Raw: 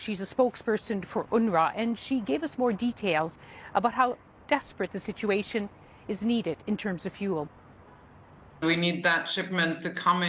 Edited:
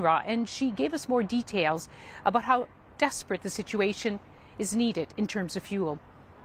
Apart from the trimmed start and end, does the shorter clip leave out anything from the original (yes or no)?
no